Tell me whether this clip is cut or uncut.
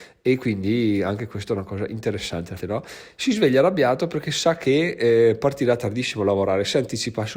cut